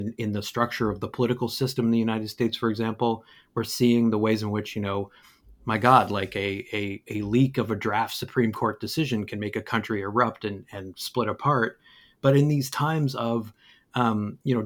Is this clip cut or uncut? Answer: uncut